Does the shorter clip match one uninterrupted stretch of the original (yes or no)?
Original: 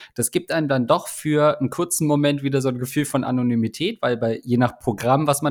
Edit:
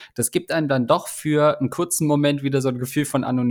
yes